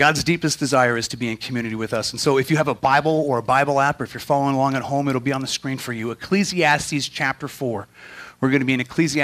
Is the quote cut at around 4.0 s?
no; 0 cuts

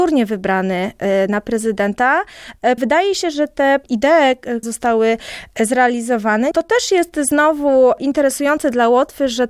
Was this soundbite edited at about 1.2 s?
no; 3 cuts; at 2.8 s, 4.6 s, 6.5 s

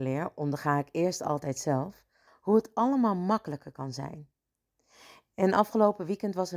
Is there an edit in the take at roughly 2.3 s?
yes; 1 cut; at 2.3 s

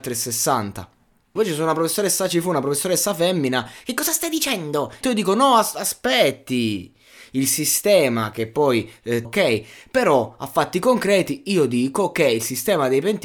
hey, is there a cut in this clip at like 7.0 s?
no; 3 cuts; at 1.4 s, 5.0 s, 9.2 s

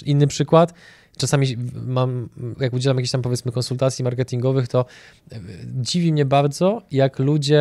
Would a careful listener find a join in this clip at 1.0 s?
no; 1 cut; at 2.5 s

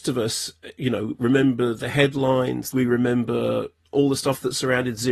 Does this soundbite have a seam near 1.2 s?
no; 1 cut; at 2.7 s

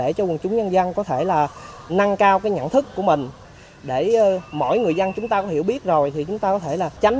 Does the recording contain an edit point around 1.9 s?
yes; 1 cut; at 1.9 s

